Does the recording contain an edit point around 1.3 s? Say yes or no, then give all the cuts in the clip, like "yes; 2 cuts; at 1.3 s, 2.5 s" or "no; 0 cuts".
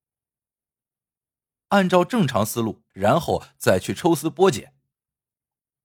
no; 1 cut; at 2.9 s